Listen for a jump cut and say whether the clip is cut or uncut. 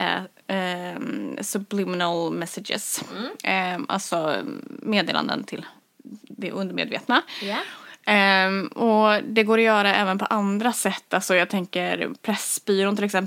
uncut